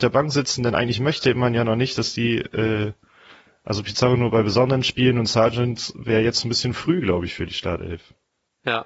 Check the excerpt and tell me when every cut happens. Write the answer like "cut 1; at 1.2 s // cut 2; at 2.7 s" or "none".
none